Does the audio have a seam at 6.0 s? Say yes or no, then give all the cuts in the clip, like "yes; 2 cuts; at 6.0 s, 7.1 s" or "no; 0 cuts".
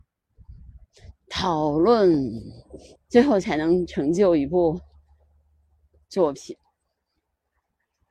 no; 2 cuts; at 1.1 s, 3.0 s